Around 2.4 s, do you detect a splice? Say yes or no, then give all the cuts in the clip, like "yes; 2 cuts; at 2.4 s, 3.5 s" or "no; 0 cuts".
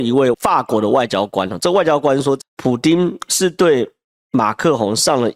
yes; 1 cut; at 2.4 s